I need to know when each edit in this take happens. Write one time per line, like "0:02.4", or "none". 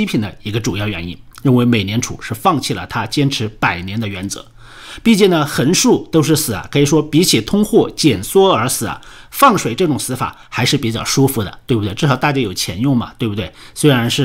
none

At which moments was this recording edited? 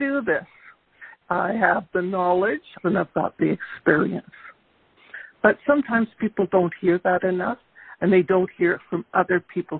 0:02.8

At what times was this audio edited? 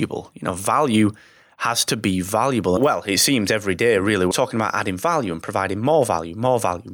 0:02.8
0:04.3

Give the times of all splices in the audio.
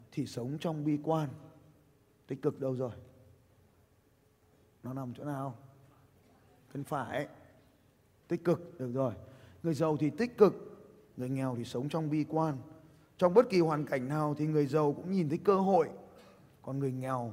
none

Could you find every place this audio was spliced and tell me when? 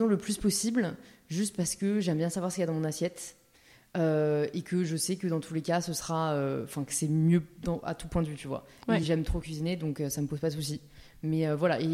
none

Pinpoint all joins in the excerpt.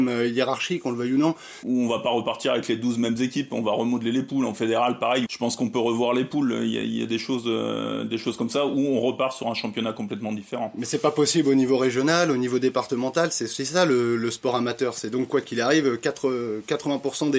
0:01.6
0:05.3

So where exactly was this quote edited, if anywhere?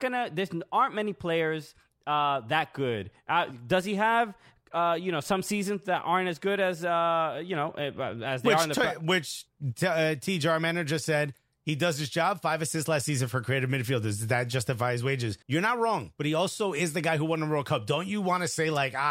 0:15.4

